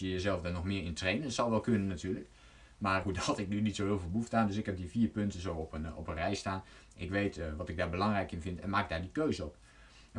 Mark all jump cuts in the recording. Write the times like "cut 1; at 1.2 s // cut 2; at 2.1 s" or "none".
cut 1; at 3.0 s